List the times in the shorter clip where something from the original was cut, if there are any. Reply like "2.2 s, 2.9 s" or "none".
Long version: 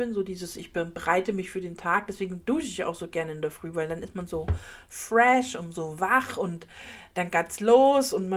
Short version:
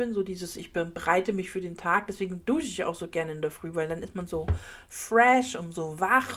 none